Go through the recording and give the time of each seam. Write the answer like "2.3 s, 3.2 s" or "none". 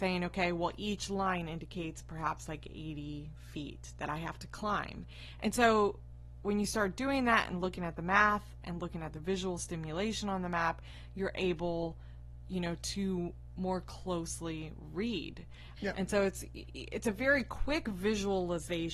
15.8 s

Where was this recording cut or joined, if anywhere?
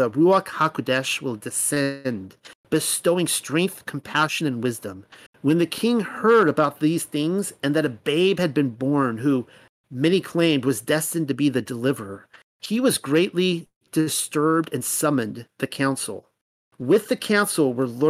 5.3 s

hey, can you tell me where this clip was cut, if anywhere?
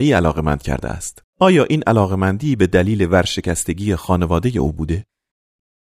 1.3 s

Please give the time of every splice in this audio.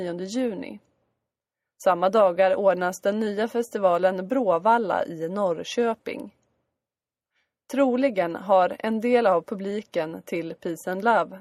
none

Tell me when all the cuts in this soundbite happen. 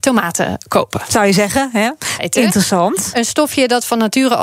2.2 s

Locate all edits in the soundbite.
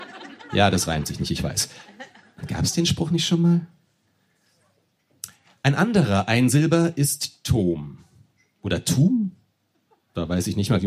none

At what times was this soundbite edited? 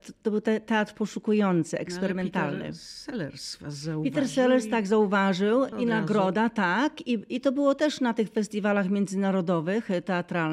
5.7 s

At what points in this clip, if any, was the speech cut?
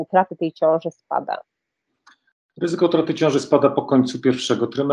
none

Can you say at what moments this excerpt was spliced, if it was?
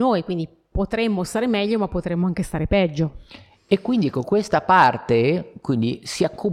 none

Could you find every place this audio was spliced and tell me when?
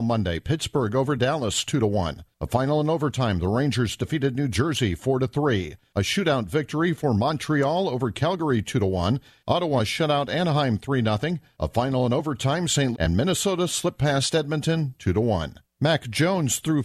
12.9 s, 15.6 s

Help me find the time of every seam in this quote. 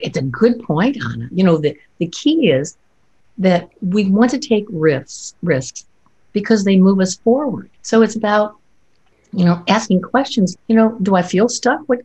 1.3 s, 7.8 s, 10.5 s

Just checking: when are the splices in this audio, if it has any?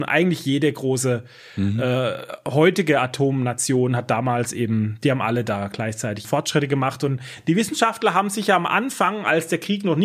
6.2 s

